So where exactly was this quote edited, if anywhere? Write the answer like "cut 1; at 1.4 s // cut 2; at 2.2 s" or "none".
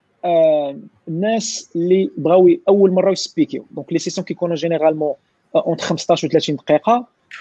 cut 1; at 1.0 s